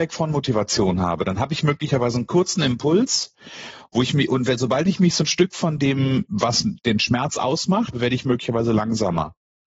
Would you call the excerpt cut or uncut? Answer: cut